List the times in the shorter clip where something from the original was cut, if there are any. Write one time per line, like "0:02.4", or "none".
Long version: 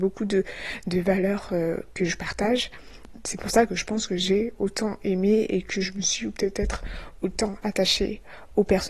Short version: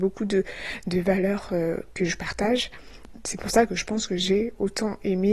none